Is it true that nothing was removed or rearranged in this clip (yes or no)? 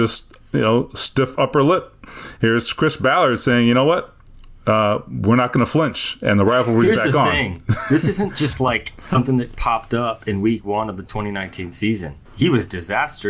no